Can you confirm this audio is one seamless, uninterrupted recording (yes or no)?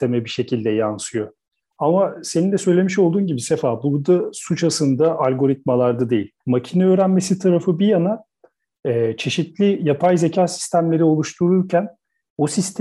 no